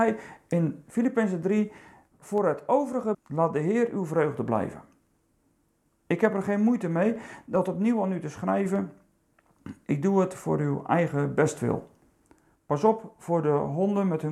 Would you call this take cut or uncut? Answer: cut